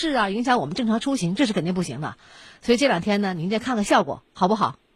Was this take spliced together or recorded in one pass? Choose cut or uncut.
uncut